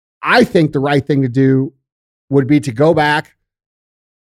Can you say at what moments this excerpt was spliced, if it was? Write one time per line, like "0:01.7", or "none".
0:02.3